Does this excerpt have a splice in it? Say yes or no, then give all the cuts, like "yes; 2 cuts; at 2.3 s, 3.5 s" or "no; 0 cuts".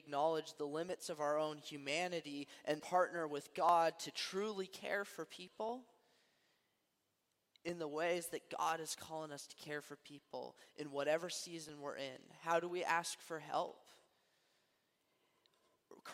yes; 1 cut; at 2.8 s